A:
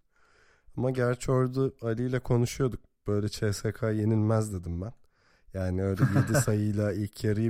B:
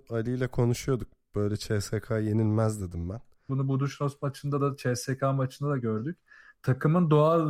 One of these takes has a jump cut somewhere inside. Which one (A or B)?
B